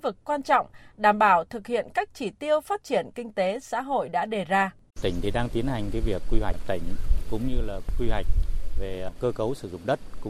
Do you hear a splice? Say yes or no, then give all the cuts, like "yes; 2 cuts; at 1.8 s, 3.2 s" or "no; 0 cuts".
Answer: yes; 1 cut; at 4.9 s